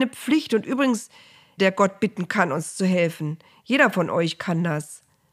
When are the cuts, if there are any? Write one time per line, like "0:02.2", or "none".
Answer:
0:01.6